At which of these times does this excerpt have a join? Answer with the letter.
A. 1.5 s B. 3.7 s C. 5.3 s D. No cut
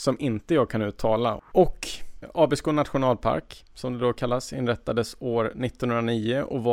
A